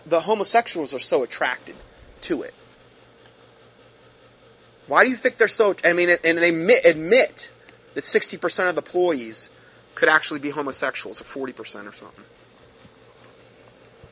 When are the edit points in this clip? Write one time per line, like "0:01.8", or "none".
none